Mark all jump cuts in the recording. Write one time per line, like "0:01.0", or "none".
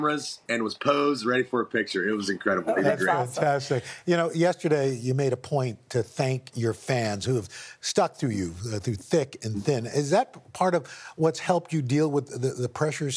none